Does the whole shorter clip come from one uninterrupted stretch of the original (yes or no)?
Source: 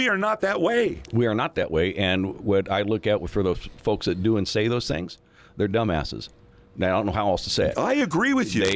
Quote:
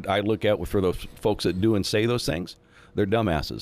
yes